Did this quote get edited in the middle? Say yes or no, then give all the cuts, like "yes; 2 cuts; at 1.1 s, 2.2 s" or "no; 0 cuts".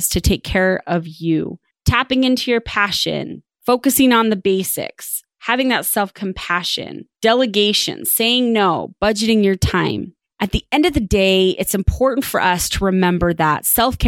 yes; 1 cut; at 7.1 s